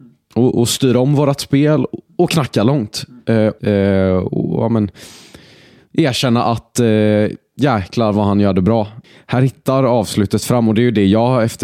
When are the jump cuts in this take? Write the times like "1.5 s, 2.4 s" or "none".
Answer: 3.6 s

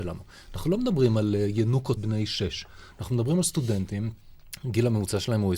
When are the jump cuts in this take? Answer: 2.0 s

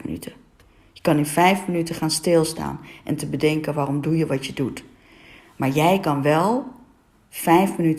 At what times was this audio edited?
5.4 s

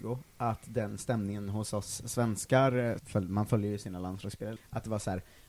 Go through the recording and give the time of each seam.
3.0 s, 4.6 s

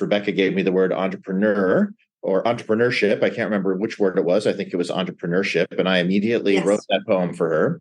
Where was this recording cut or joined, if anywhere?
none

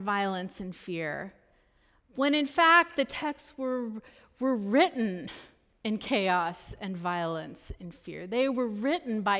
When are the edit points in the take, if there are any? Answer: none

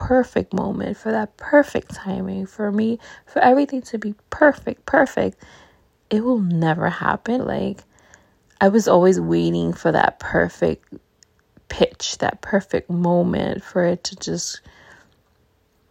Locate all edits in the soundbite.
7.4 s

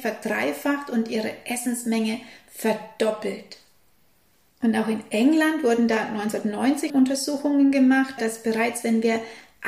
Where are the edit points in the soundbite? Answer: 6.9 s, 8.2 s

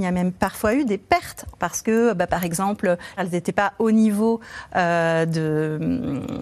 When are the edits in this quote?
1.5 s, 3.2 s

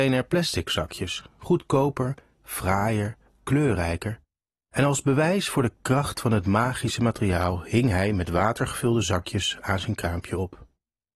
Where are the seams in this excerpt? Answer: none

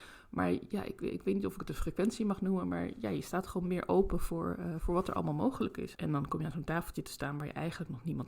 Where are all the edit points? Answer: 5.9 s

